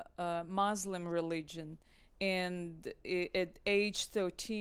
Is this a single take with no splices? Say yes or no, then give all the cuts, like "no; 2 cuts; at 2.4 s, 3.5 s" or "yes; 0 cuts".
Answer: yes; 0 cuts